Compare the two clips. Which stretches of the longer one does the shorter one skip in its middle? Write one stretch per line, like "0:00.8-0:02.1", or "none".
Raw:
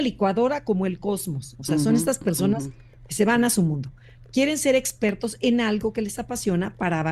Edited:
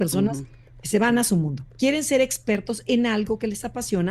0:04.0-0:04.2

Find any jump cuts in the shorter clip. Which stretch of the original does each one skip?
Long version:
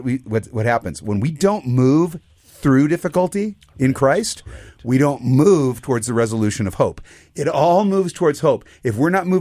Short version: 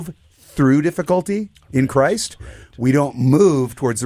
none

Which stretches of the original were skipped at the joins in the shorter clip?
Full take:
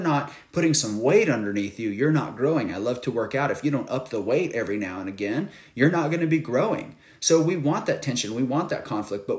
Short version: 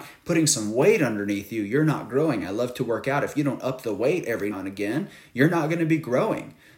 0:04.8-0:04.9

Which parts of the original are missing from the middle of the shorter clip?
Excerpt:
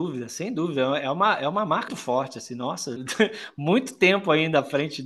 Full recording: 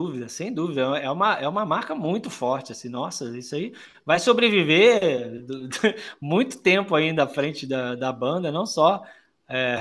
0:01.9-0:02.2
0:03.3-0:05.6

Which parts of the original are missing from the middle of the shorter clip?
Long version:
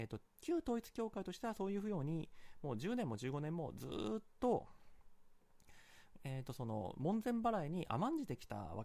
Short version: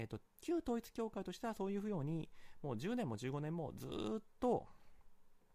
none

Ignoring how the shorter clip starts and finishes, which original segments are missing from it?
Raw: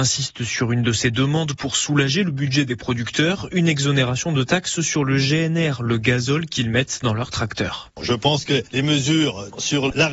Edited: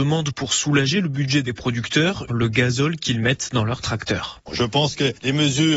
0:03.5-0:05.8

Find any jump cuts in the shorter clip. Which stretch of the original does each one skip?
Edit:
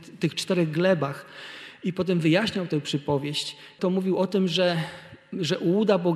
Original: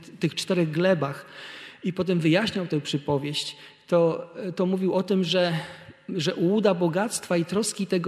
0:03.8-0:04.6

